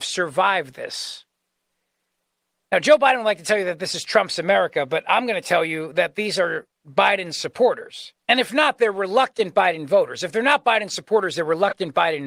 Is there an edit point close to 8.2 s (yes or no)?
yes